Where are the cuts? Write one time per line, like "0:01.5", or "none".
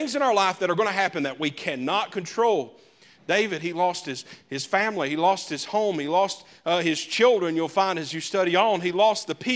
none

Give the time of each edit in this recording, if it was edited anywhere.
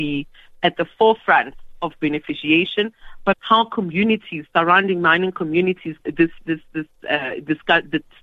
0:03.3
0:06.0

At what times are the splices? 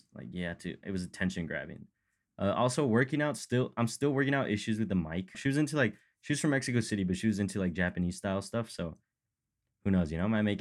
0:05.3

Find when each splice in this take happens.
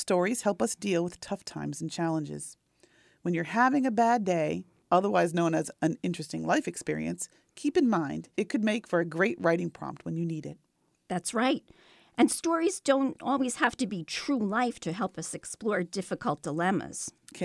0:08.3

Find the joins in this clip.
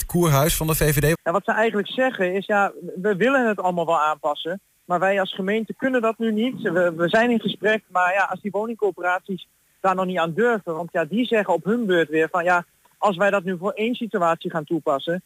0:01.1

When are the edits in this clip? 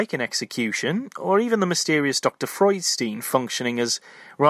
none

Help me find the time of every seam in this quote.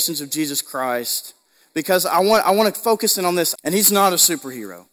0:03.6

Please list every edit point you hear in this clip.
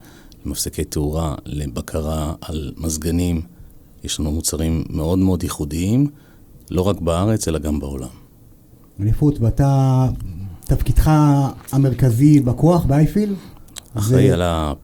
none

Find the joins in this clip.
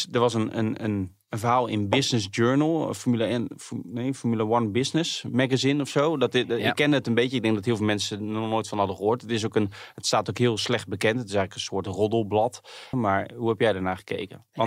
0:12.9

